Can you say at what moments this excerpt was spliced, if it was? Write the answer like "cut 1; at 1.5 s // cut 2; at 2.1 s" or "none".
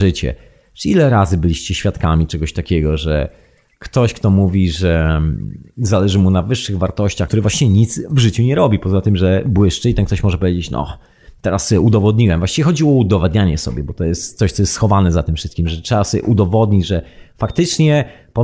cut 1; at 7.3 s